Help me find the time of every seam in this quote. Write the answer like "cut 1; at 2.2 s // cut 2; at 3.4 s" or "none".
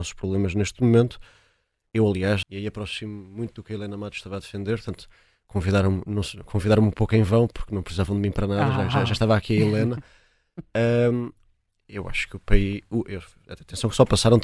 cut 1; at 2.4 s